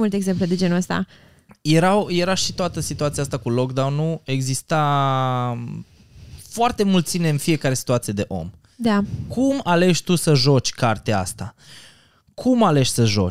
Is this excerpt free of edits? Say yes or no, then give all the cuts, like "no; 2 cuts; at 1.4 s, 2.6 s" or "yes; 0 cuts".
yes; 0 cuts